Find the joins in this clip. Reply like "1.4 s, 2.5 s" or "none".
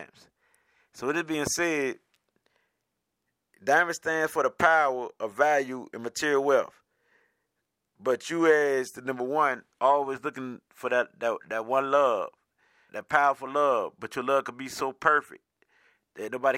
12.9 s